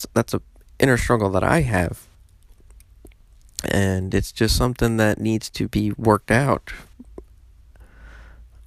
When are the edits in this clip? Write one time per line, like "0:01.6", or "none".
none